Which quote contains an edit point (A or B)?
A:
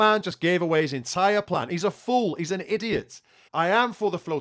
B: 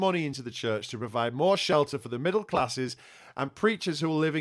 A